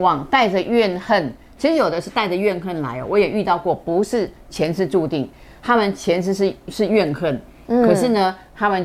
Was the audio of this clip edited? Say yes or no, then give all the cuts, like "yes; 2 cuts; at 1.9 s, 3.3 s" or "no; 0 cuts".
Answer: no; 0 cuts